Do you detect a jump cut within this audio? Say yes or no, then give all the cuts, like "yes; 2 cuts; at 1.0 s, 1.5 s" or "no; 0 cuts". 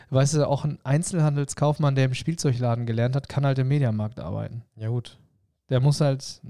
no; 0 cuts